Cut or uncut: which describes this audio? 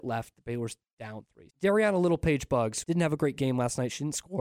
cut